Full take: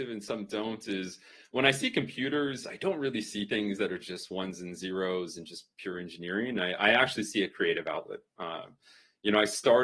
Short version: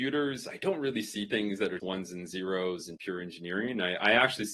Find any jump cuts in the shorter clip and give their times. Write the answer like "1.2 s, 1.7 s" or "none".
1.8 s, 3.0 s